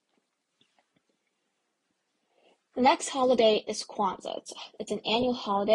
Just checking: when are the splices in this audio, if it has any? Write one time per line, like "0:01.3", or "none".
none